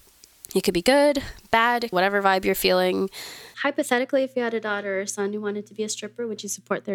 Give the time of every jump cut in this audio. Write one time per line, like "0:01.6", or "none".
0:01.9
0:03.5